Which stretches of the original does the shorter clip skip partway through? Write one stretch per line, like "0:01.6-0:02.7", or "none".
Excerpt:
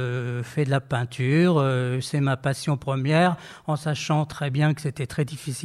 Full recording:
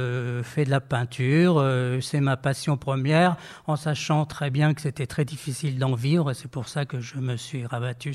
none

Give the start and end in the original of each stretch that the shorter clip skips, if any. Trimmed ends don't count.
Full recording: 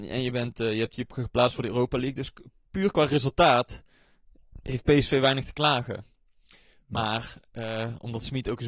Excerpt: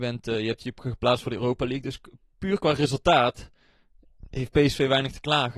none

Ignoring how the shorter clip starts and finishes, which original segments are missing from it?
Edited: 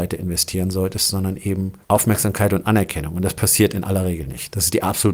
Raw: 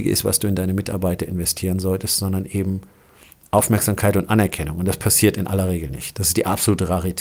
0:02.9-0:03.5

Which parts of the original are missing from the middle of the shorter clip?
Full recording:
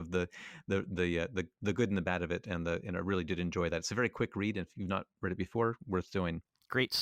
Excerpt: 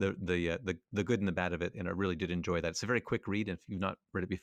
0:02.4-0:02.8

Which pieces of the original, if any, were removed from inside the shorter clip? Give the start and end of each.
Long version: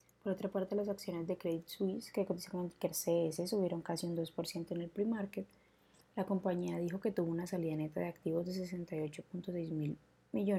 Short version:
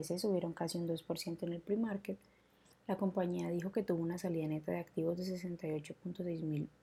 none

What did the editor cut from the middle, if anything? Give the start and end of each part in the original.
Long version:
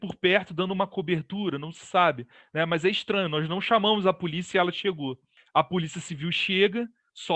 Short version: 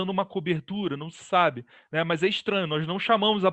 none

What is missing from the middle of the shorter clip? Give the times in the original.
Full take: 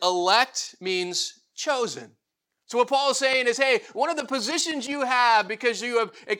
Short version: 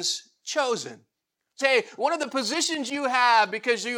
0:02.7-0:03.6

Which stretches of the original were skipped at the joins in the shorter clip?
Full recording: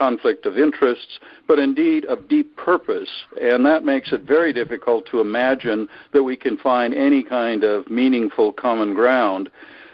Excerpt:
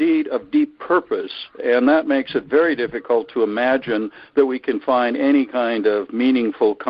none

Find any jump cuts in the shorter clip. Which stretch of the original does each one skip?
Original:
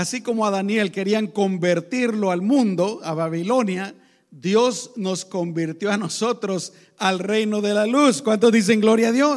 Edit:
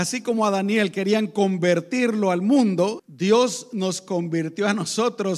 0:03.0-0:04.2

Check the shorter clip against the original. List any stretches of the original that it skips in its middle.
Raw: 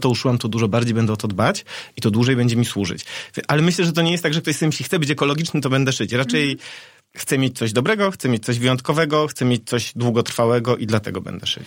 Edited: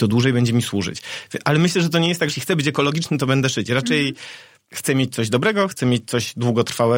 0:04.3-0:04.7
0:08.1-0:09.3

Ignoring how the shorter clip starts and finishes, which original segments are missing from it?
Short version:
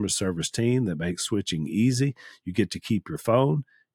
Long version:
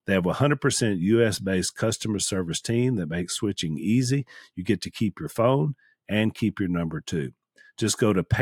none

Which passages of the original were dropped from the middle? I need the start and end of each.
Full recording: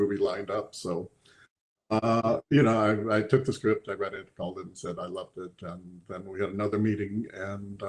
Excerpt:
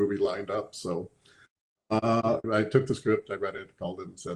0:02.4-0:03.0

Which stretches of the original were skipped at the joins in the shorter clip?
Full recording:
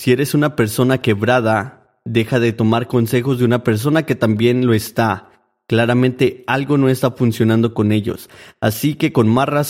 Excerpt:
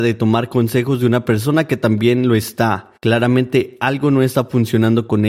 0:05.4-0:05.6

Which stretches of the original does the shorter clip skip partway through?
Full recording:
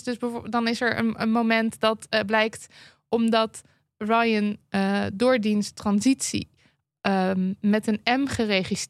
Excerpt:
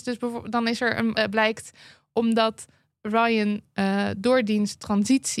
0:01.2-0:02.1

